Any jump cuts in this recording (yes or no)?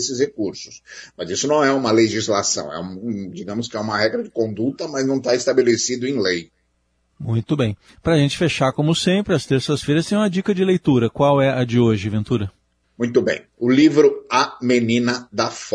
no